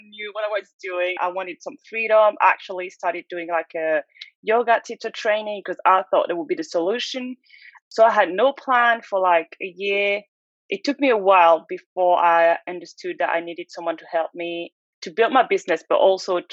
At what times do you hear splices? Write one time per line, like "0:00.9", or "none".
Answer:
0:01.2